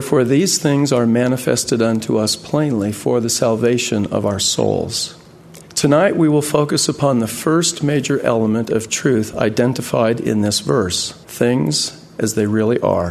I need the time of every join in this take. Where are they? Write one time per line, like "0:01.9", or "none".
0:05.6
0:11.2